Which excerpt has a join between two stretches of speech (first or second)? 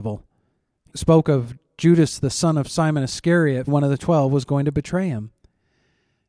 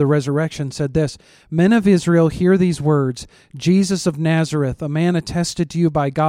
first